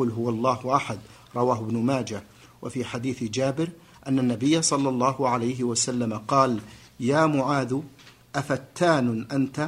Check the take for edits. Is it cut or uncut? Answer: uncut